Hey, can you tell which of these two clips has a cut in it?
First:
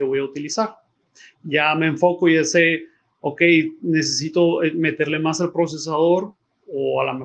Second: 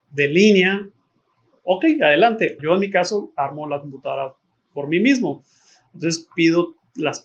second; 1 cut; at 2.6 s

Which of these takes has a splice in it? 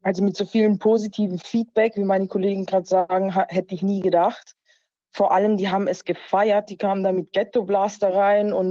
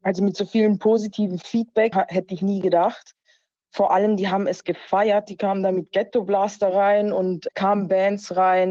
second; 1 cut; at 1.9 s

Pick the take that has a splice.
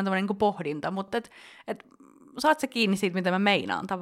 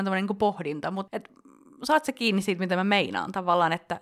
second; 1 cut; at 1.1 s

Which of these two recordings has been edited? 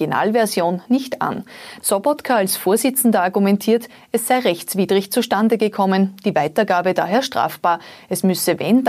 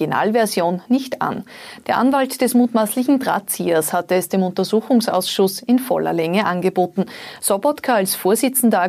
first; 1 cut; at 1.8 s

